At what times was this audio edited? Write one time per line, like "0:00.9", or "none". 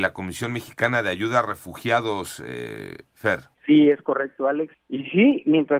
0:03.5
0:04.7